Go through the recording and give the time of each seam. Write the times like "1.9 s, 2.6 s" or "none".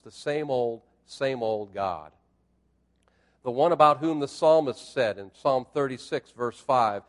none